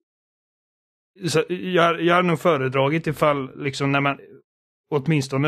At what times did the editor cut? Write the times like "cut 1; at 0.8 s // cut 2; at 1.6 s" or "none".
none